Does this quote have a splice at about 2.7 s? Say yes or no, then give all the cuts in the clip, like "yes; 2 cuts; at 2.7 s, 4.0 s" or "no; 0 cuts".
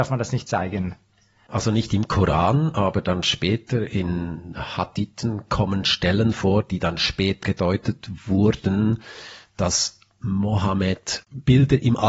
no; 1 cut; at 7.4 s